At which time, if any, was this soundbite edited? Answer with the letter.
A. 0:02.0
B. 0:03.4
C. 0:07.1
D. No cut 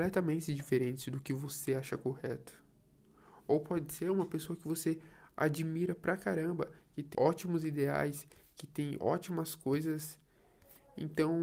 C